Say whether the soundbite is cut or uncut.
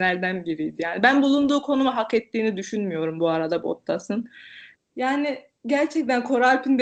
cut